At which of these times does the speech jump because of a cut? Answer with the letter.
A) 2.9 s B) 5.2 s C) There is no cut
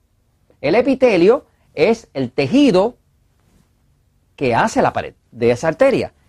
B